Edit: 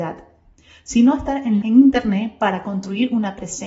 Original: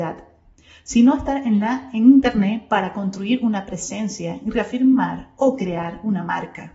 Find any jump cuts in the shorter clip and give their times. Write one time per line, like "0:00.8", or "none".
0:01.6